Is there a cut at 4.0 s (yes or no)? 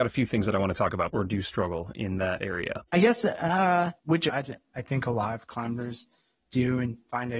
yes